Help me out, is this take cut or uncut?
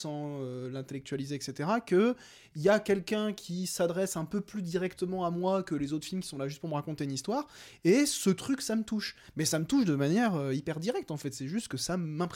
uncut